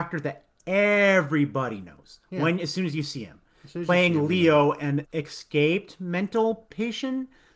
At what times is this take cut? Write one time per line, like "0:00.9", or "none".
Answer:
0:05.0